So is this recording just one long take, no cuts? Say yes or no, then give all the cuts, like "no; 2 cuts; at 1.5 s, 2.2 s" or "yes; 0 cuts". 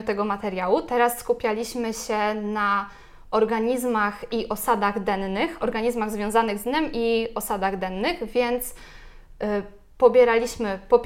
yes; 0 cuts